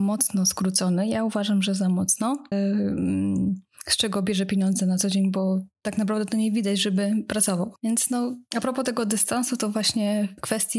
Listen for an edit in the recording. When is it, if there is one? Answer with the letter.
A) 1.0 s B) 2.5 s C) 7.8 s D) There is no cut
B